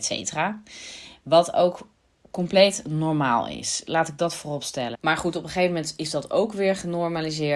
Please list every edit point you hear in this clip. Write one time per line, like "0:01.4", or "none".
0:04.9